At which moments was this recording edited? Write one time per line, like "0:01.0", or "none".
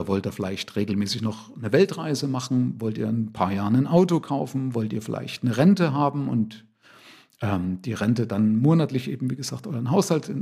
none